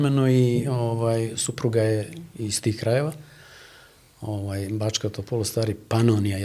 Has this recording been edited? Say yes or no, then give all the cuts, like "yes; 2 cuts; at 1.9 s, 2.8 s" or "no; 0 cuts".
no; 0 cuts